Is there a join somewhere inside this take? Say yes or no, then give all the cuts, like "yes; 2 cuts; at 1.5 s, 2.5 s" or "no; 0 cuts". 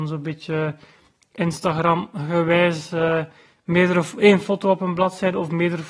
no; 0 cuts